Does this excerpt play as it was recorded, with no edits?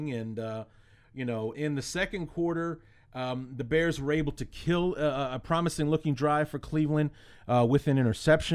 no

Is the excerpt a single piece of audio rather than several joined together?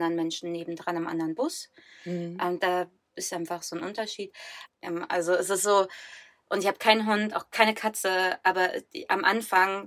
no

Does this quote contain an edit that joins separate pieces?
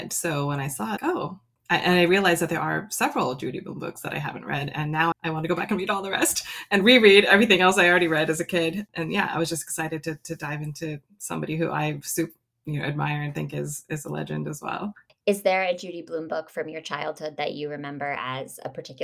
yes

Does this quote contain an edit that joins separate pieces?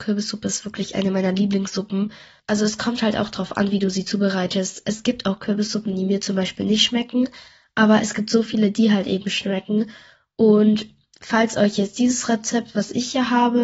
no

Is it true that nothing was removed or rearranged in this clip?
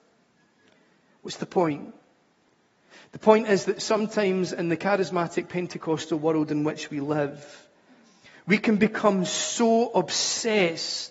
yes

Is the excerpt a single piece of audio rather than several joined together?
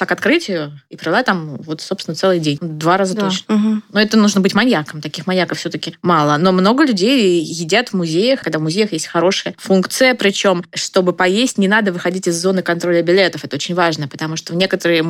no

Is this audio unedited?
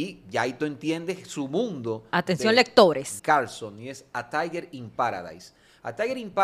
no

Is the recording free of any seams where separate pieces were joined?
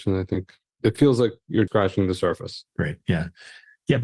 no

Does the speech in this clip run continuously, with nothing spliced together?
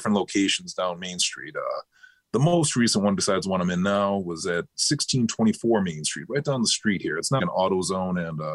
no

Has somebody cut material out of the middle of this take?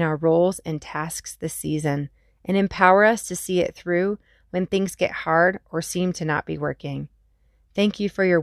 no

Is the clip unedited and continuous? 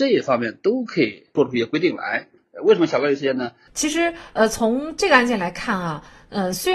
no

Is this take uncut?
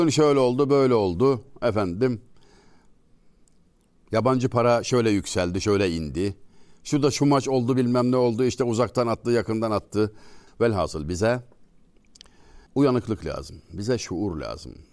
no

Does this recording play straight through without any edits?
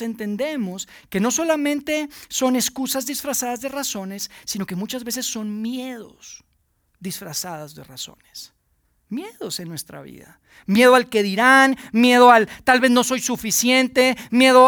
yes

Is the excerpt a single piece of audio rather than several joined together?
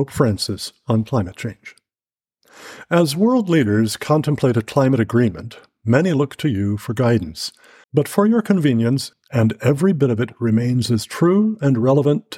no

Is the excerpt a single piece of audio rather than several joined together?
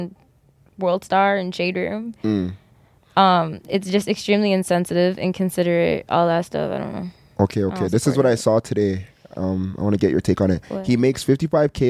yes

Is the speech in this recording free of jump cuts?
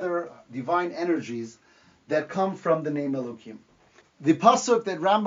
no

